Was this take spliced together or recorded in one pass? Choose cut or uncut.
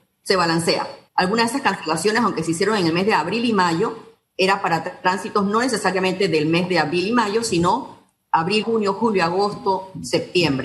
cut